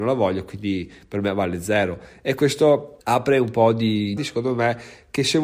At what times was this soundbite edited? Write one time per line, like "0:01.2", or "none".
0:03.0
0:04.2